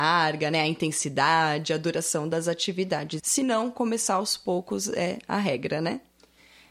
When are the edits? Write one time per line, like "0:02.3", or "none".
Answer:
0:03.2